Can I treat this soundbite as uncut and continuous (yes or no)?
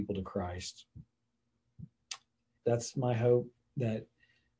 no